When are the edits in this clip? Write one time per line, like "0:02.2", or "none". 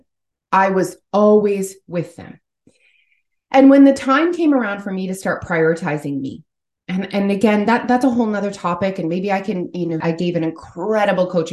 0:10.0